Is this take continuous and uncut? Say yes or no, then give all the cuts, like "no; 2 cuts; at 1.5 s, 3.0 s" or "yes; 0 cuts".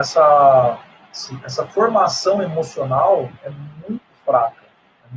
yes; 0 cuts